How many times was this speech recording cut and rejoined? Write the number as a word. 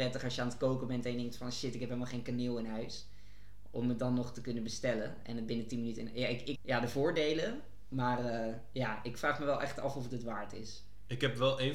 one